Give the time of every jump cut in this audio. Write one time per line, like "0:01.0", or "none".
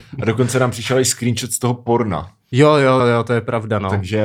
0:03.0